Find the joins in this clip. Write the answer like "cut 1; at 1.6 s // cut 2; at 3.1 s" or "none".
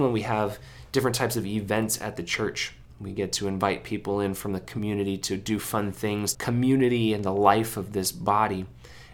cut 1; at 6.3 s